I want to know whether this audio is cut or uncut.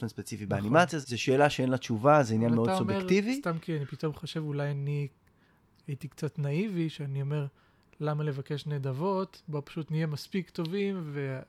cut